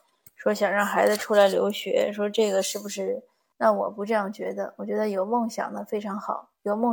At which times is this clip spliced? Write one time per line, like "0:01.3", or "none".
0:03.5